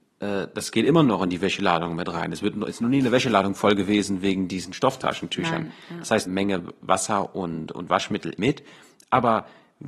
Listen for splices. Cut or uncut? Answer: cut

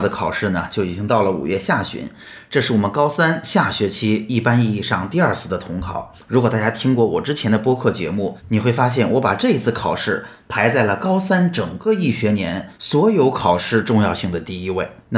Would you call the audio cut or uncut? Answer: cut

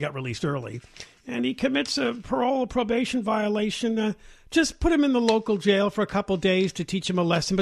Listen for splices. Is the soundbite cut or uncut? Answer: uncut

